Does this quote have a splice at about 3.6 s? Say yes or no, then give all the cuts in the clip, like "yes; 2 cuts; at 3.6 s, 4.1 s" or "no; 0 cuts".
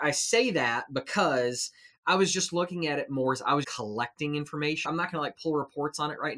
yes; 2 cuts; at 3.6 s, 4.8 s